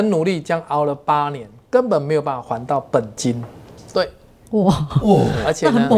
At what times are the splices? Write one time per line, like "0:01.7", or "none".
0:03.9